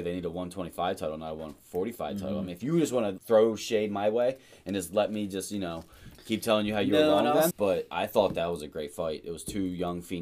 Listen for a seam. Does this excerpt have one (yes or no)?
yes